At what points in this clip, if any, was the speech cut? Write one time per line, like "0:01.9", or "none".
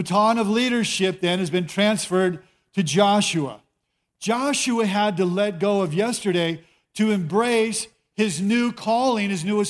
none

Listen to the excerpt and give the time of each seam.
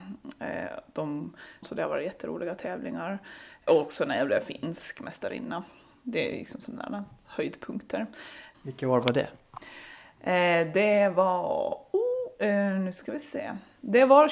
0:01.6
0:03.7
0:08.5

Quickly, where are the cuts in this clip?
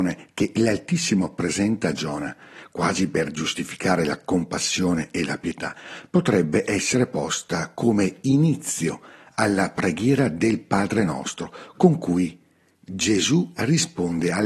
none

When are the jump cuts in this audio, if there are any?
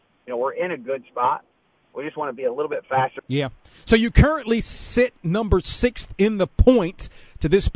0:03.2

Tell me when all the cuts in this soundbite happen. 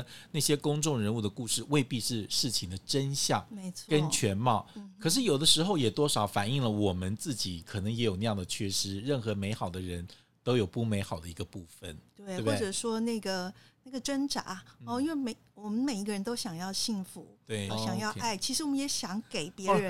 0:17.7

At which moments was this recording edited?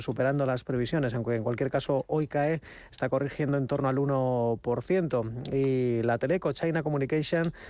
none

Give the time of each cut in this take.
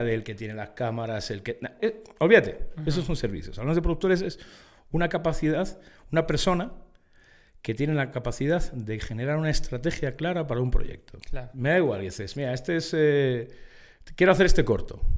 0:01.8

